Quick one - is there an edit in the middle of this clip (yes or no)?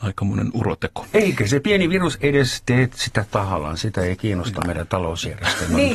no